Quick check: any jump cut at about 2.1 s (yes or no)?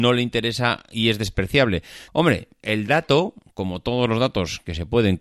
yes